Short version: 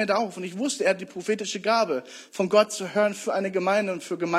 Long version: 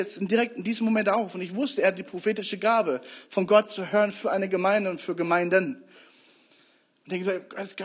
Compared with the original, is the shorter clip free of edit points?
yes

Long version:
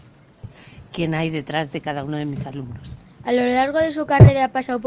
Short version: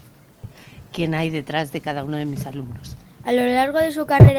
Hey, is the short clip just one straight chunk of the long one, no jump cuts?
yes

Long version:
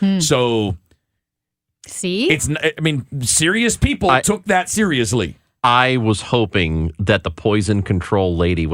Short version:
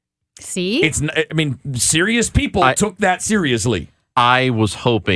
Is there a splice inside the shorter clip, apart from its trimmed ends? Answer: no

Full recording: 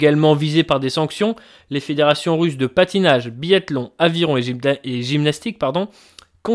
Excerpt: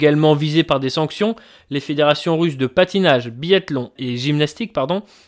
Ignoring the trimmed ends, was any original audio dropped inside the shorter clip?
yes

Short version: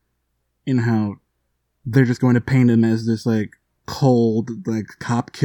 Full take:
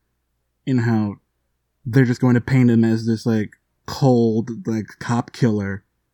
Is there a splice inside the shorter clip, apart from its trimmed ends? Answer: no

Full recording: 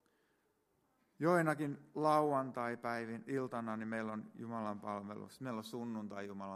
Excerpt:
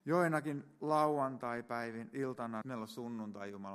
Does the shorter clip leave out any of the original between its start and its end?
yes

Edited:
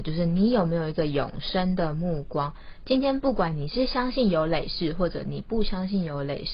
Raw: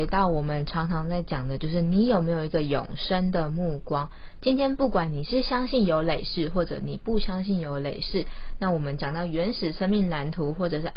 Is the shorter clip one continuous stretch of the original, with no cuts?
yes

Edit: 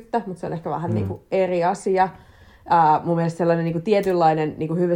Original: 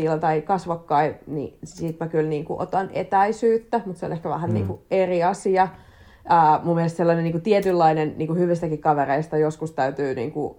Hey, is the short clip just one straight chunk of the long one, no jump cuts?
yes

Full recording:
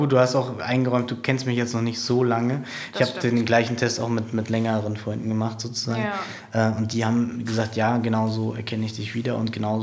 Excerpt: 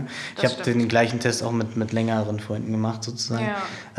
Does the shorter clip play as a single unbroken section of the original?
yes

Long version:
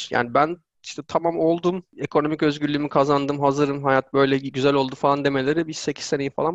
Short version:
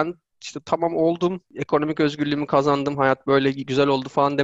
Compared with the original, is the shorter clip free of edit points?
no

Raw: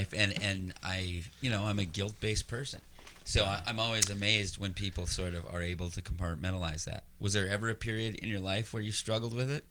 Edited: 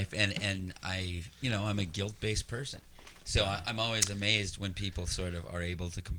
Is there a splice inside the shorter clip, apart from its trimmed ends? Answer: no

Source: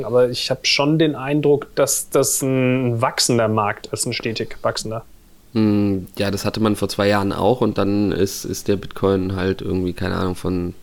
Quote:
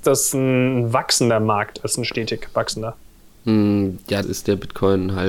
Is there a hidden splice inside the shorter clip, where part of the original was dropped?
yes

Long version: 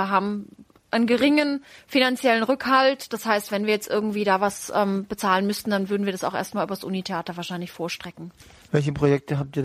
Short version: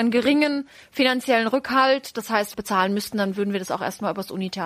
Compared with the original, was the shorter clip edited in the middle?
yes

